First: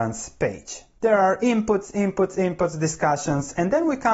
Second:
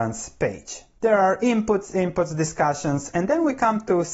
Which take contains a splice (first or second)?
second